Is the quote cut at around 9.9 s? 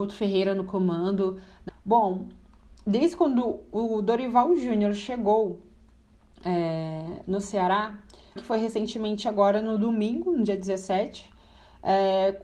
no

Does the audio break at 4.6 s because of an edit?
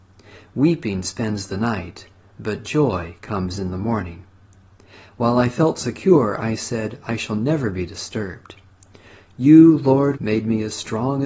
no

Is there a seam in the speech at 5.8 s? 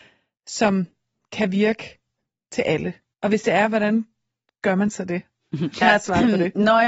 yes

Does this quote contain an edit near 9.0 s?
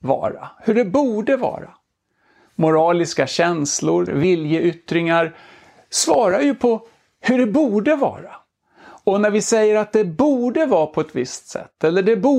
no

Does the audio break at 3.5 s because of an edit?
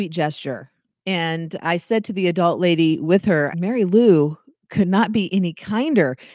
yes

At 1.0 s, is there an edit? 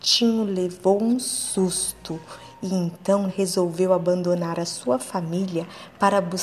no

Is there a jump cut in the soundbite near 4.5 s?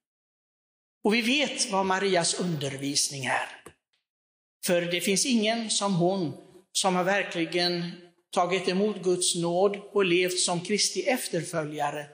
yes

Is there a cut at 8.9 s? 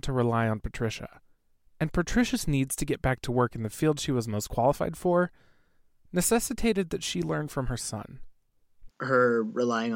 yes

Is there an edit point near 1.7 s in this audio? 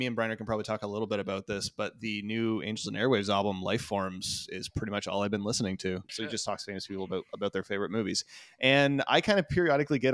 no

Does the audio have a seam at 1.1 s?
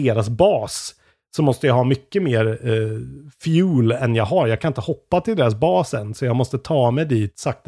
no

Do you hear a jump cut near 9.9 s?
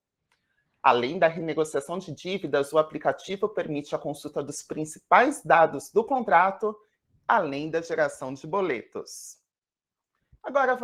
no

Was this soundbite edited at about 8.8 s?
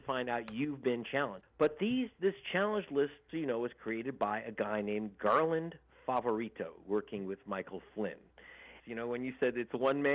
yes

